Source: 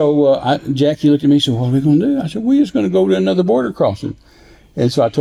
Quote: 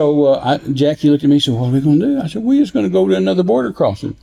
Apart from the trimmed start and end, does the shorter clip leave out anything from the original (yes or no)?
no